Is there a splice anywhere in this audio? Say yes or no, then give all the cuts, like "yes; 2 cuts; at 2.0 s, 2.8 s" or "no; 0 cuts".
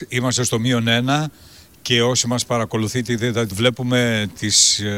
yes; 1 cut; at 3.5 s